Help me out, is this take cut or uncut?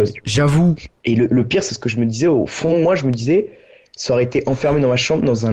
cut